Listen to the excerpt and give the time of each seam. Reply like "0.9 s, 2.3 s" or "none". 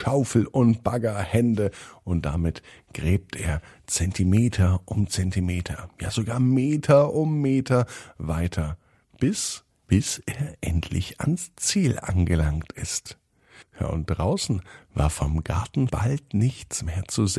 9.8 s, 13.6 s, 15.9 s